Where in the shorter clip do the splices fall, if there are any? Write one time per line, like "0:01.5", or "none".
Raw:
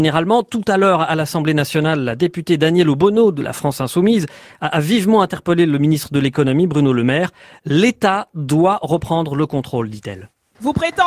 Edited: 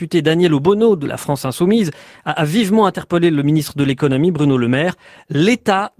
none